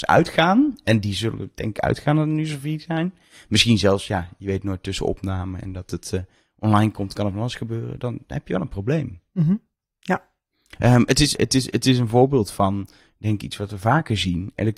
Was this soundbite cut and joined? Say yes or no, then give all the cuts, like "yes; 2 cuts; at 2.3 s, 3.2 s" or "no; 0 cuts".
yes; 1 cut; at 11.4 s